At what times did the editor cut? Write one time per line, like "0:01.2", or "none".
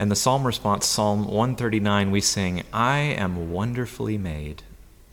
none